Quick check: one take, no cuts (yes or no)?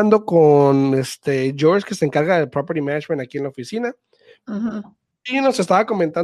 yes